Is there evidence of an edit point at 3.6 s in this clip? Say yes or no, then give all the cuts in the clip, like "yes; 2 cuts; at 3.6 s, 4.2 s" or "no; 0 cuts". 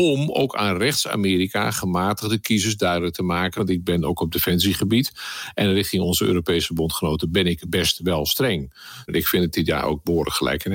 yes; 2 cuts; at 3.6 s, 9.1 s